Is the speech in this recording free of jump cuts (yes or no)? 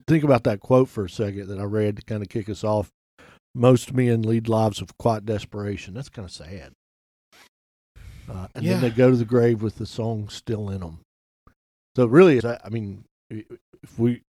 no